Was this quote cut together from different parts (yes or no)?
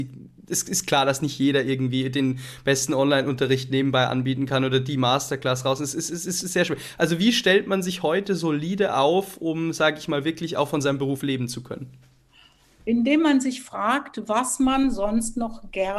no